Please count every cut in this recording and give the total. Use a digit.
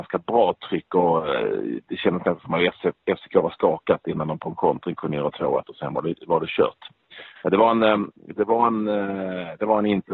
0